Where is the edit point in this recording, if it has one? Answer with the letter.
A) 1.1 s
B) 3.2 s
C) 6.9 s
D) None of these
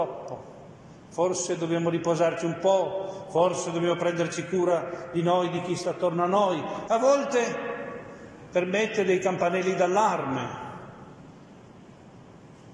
C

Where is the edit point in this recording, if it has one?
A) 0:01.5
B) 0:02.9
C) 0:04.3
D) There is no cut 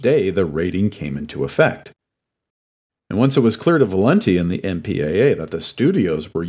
B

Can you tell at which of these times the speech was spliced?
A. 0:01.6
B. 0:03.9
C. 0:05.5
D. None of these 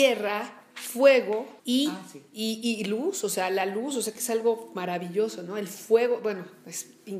A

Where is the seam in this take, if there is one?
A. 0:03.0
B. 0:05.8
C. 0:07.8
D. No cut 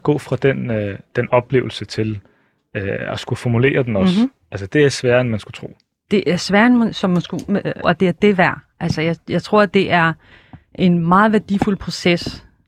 C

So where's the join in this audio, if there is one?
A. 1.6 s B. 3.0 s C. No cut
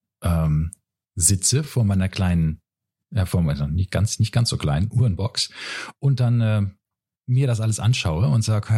C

